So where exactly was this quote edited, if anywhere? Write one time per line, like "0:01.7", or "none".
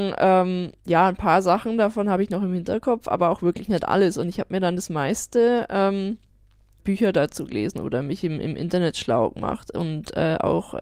0:06.8